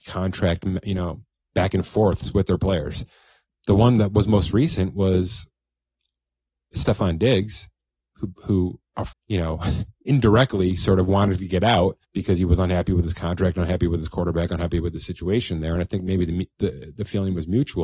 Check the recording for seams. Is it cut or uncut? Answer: cut